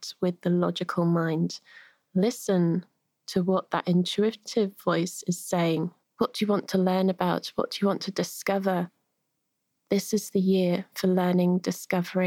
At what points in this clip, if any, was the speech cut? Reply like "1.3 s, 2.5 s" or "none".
6.0 s